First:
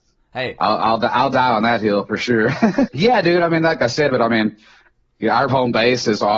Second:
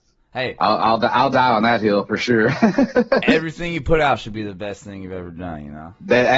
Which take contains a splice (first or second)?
first